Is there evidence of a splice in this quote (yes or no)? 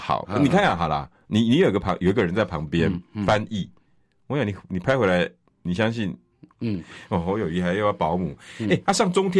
yes